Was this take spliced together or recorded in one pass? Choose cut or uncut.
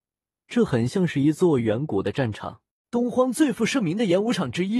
cut